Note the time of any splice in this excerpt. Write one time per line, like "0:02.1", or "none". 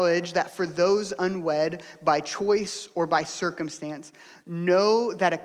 none

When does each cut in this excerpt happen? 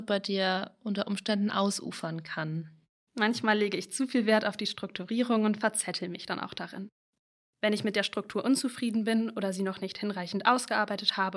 0:03.1

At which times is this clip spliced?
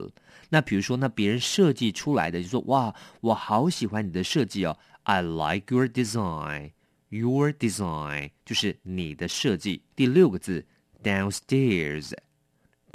0:09.9

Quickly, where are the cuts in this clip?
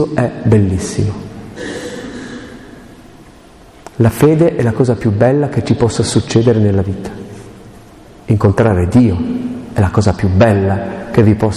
none

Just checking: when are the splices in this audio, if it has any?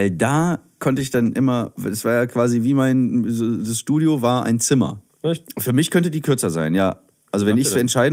0:05.1

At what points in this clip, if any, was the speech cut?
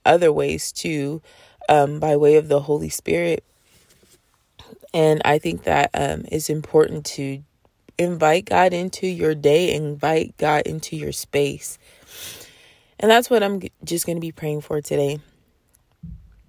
none

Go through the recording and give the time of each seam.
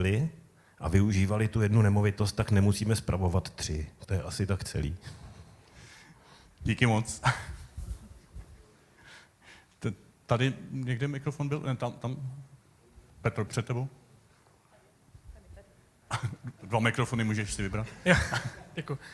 0:13.5

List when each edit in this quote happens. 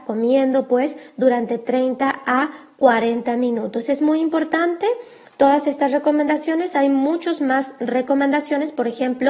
none

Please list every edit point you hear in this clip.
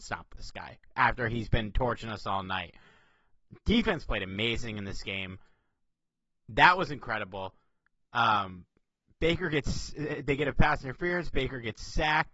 0:08.0

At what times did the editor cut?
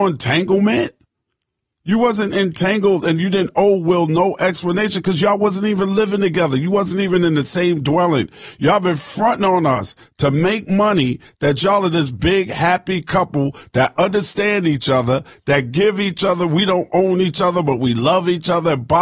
none

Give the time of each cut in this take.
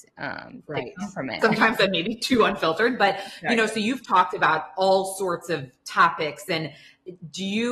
0:01.4

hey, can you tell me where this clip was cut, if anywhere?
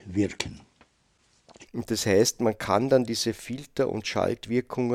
0:01.7

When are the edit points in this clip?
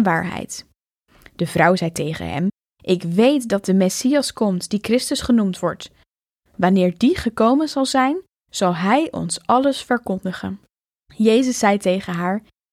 none

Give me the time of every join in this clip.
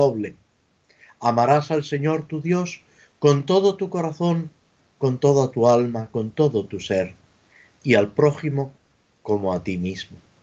none

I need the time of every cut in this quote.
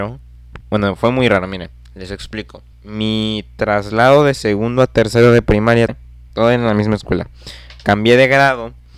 0:02.7
0:05.9

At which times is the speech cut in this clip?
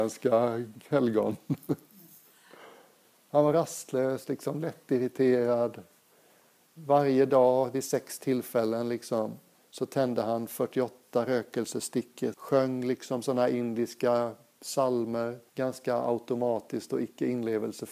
0:12.3
0:15.5

